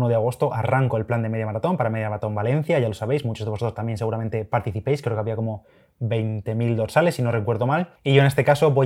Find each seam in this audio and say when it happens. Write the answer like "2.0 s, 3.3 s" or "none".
none